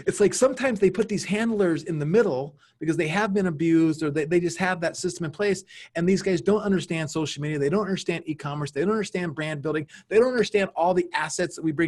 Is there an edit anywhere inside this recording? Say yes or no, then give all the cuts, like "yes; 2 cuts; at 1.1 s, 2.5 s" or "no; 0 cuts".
no; 0 cuts